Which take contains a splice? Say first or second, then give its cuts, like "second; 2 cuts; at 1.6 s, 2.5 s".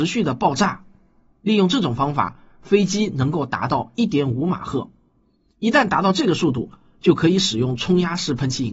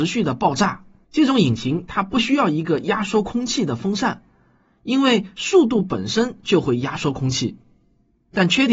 second; 1 cut; at 1.0 s